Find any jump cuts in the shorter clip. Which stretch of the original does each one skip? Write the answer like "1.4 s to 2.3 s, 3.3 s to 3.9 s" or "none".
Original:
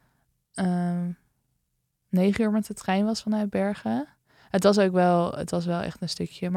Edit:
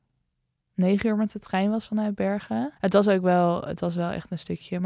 4.1 s to 4.5 s